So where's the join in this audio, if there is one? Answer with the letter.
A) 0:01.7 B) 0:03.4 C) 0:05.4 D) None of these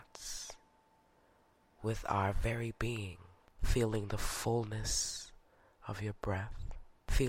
B